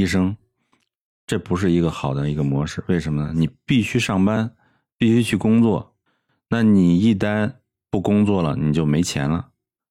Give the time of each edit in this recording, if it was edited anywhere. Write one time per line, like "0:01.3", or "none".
none